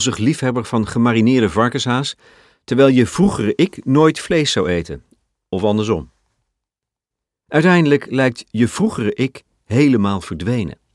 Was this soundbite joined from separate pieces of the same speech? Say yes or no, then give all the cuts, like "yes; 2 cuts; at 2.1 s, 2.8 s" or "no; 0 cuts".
no; 0 cuts